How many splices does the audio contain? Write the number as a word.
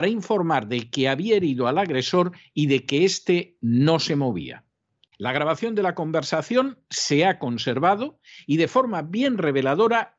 one